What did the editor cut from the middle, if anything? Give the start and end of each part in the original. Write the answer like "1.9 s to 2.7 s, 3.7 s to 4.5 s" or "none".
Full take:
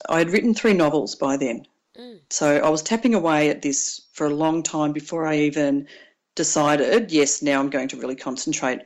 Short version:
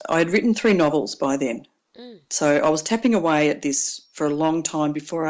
none